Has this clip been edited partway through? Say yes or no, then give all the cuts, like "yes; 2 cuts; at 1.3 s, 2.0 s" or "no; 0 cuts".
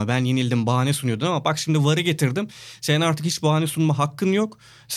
no; 0 cuts